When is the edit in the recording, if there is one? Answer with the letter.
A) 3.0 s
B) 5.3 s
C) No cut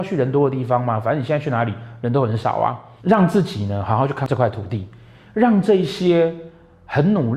A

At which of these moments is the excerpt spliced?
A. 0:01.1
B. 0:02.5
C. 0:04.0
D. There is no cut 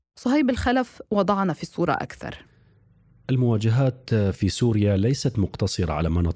D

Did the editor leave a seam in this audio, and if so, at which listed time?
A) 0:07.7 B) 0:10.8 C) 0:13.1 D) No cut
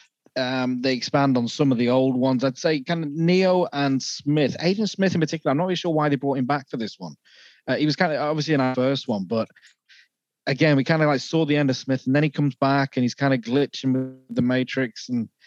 D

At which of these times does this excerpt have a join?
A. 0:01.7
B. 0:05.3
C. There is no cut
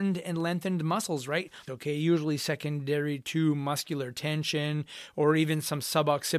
A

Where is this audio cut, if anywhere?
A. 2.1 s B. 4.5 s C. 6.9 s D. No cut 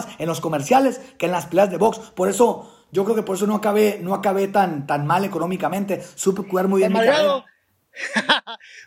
D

